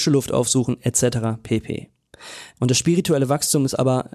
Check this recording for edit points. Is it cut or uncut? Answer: uncut